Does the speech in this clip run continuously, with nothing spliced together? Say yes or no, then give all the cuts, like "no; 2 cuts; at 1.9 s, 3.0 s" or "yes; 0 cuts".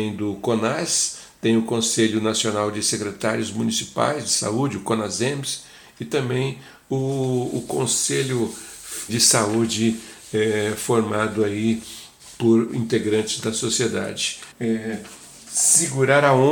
no; 2 cuts; at 9.1 s, 14.5 s